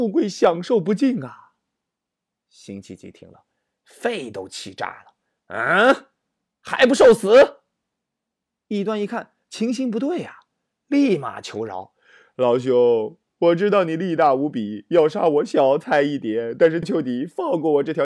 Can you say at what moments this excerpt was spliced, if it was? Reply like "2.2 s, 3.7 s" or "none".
16.8 s

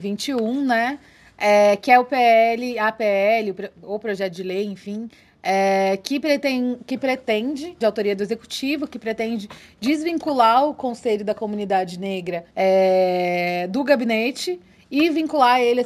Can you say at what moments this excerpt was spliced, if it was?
7.8 s, 12.5 s

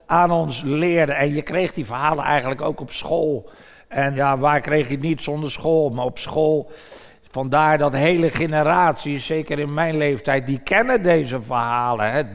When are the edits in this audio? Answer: 4.2 s

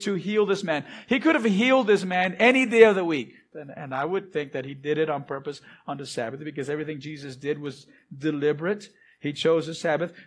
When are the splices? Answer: 3.5 s

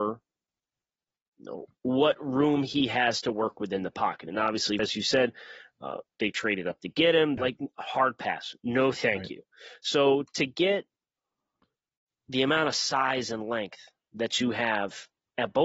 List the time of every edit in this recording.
4.8 s, 7.4 s

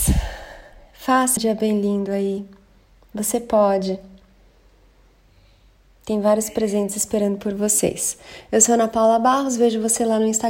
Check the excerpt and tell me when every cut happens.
1.4 s

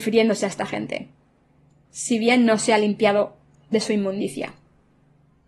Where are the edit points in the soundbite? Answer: 1.8 s

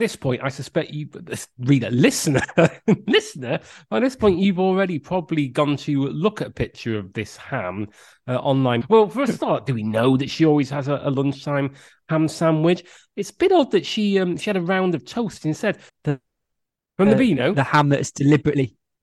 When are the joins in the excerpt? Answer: 8.8 s, 15.9 s

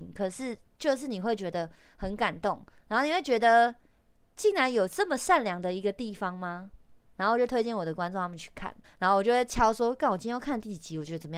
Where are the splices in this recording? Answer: 7.1 s, 8.8 s

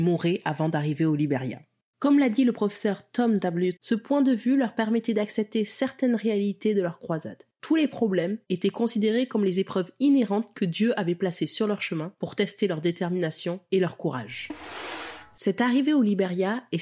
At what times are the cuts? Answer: 3.8 s, 8.5 s

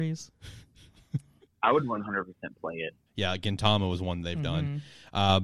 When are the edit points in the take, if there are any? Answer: 3.1 s

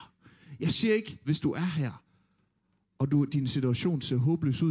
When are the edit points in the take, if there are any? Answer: 1.2 s

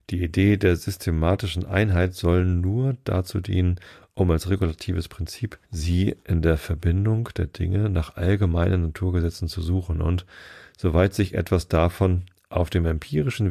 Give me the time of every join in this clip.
5.6 s

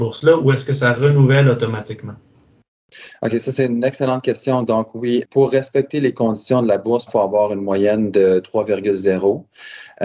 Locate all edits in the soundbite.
5.2 s, 7.1 s

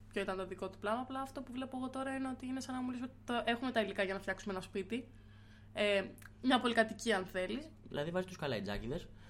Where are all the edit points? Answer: 7.8 s

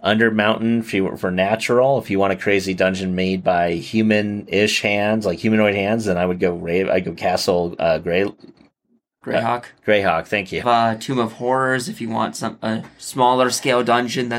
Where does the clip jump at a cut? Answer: 10.6 s

